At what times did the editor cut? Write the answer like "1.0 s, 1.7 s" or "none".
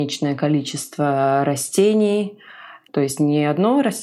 2.9 s

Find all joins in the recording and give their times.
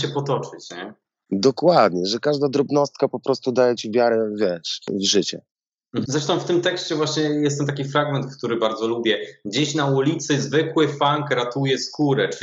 6.1 s

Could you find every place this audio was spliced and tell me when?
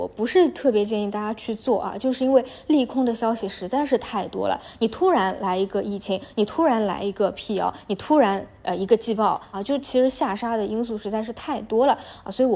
9.5 s

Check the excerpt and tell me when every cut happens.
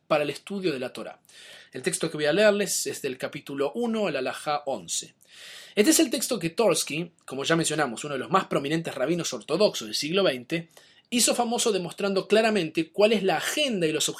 none

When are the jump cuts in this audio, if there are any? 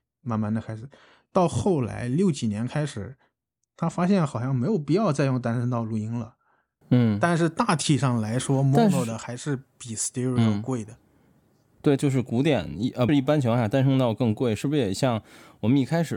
6.8 s, 12.0 s, 13.1 s

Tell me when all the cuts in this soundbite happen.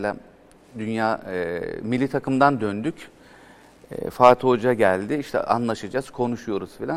none

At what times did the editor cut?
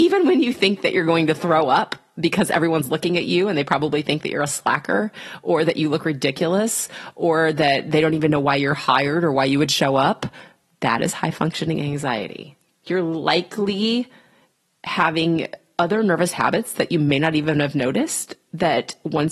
none

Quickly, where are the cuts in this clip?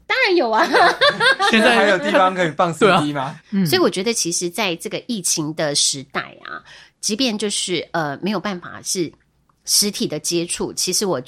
3.4 s

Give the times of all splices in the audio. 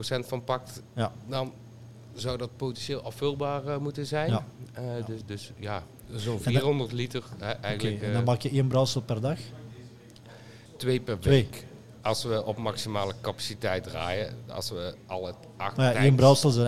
10.7 s

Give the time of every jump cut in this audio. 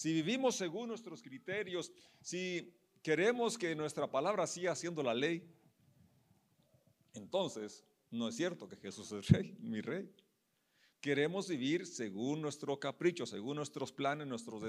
10.9 s

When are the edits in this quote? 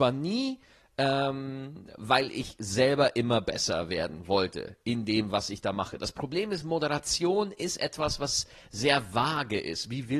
none

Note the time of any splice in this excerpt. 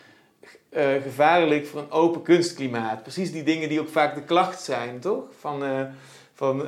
none

